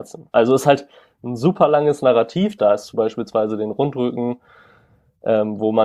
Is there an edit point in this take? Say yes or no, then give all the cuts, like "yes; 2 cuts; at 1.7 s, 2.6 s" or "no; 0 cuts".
yes; 1 cut; at 2.6 s